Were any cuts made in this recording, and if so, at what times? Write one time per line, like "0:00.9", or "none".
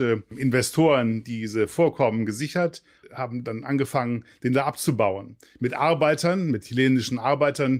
none